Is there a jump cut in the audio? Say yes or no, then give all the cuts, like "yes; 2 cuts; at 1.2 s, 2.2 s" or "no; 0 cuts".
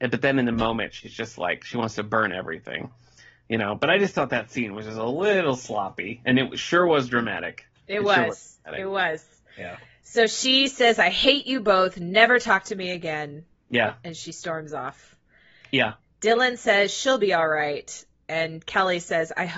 no; 0 cuts